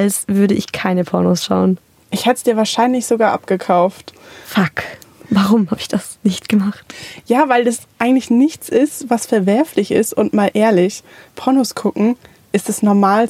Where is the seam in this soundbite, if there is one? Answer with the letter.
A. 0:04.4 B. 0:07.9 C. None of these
C